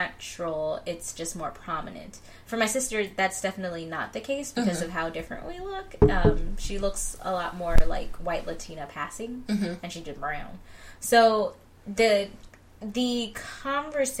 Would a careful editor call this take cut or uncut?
uncut